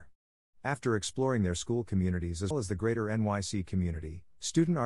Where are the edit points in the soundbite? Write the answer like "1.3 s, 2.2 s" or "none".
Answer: 2.5 s